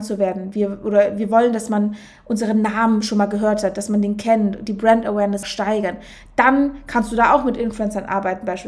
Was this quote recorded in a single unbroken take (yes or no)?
no